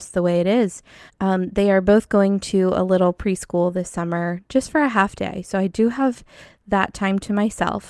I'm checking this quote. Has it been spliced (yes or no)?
yes